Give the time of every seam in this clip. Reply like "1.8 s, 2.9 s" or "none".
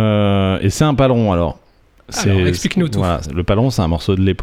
3.2 s